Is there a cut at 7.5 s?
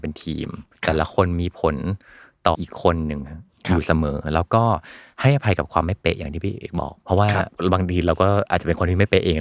no; 1 cut; at 2.5 s

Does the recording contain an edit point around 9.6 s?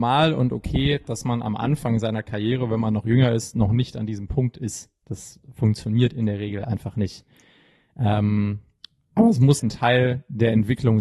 yes; 1 cut; at 9.6 s

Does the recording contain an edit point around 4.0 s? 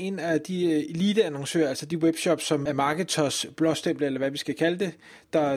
no; 1 cut; at 2.7 s

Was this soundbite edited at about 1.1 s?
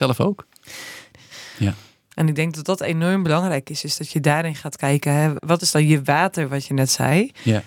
yes; 2 cuts; at 1.1 s, 5.4 s

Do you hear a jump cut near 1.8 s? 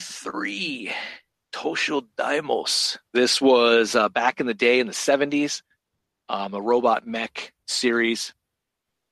no; 1 cut; at 3.1 s

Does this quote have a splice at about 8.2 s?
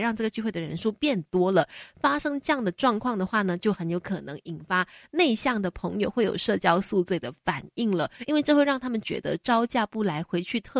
no; 0 cuts

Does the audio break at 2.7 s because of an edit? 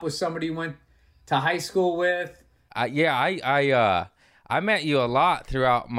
yes; 1 cut; at 2.7 s

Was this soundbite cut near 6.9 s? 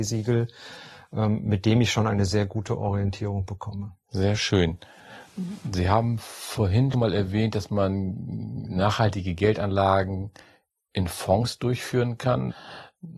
yes; 1 cut; at 6.9 s

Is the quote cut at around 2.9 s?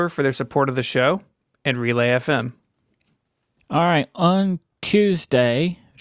no; 0 cuts

